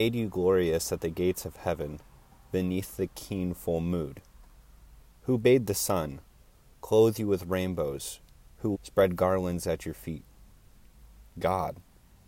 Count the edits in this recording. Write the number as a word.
one